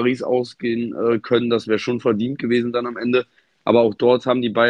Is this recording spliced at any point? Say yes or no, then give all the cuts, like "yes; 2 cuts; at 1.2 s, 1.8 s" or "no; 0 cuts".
no; 0 cuts